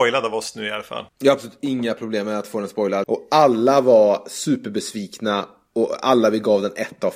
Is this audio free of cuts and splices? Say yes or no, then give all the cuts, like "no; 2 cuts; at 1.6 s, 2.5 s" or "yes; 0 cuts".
no; 2 cuts; at 1.1 s, 3.0 s